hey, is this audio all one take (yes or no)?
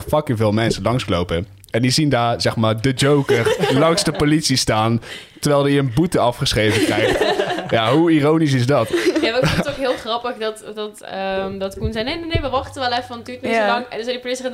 yes